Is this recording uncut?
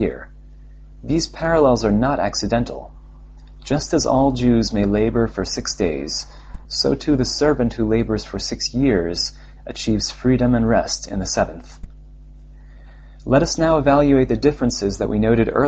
no; 1 cut; at 6.7 s

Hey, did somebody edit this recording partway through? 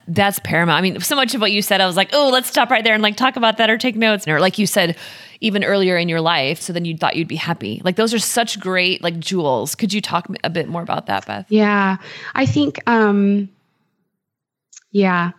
yes; 2 cuts; at 4.3 s, 6.6 s

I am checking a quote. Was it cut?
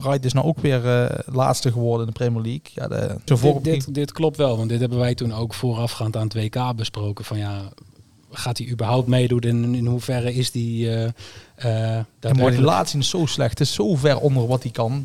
yes; 1 cut; at 3.3 s

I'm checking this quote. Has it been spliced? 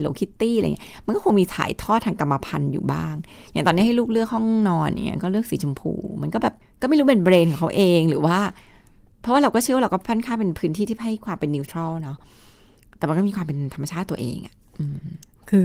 no; 0 cuts

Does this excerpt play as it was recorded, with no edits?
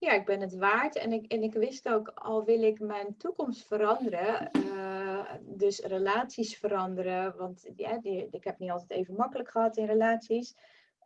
yes; 0 cuts

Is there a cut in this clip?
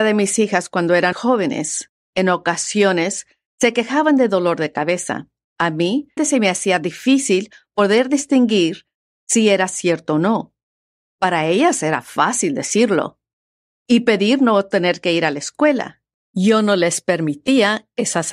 yes; 2 cuts; at 1.1 s, 6.2 s

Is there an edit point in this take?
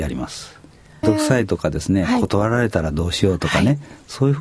yes; 1 cut; at 1.0 s

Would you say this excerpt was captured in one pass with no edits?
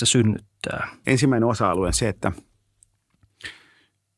no; 1 cut; at 1.0 s

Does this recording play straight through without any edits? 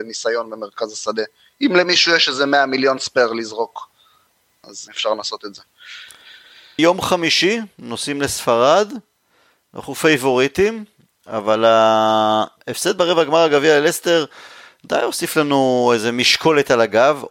no; 2 cuts; at 4.9 s, 6.8 s

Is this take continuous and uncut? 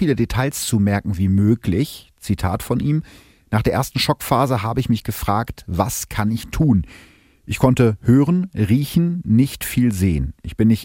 yes; 0 cuts

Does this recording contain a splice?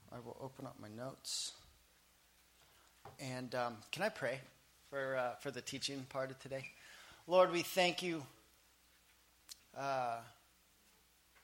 yes; 1 cut; at 9.6 s

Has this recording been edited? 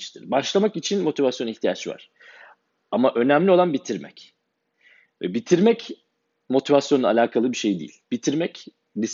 no; 0 cuts

